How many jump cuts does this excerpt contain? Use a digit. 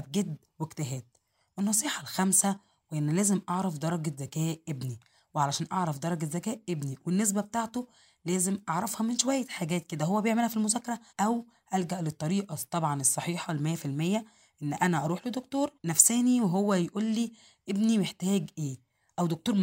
2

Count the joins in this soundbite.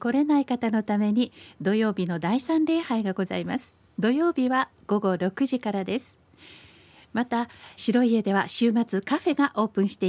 1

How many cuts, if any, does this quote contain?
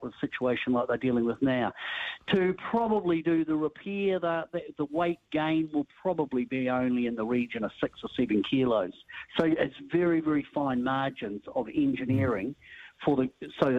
0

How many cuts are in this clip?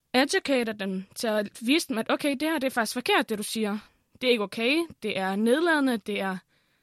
0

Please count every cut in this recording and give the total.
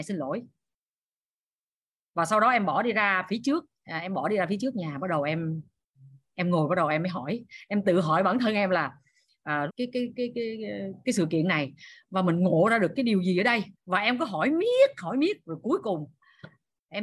2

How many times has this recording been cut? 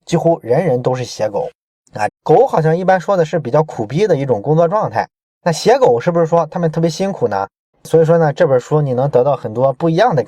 2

